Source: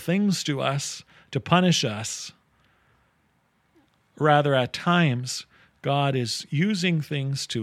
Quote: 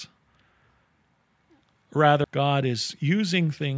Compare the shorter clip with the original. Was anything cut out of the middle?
yes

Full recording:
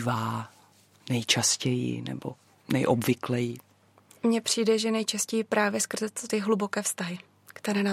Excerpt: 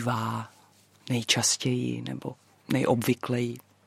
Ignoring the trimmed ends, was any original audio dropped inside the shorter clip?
no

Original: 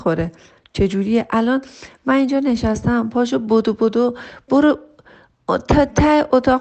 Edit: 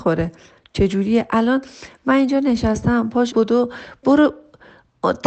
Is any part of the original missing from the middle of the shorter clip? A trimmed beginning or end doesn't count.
yes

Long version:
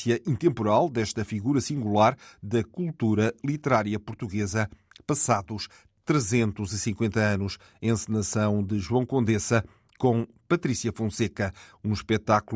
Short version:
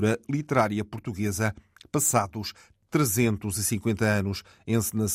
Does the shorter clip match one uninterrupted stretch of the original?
yes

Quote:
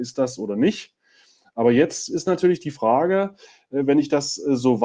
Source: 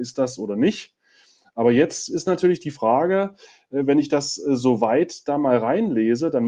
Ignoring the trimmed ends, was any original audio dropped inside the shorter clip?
no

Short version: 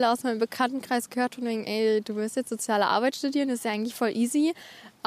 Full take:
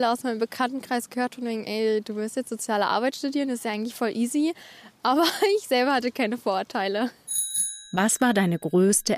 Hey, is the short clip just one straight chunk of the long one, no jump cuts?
yes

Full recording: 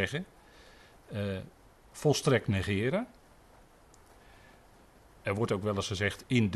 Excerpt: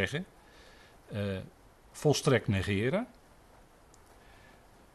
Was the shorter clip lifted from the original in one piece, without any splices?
yes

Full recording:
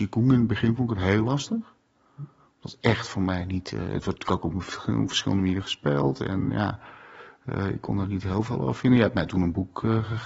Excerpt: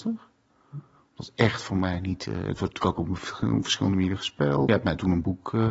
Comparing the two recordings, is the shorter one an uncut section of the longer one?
no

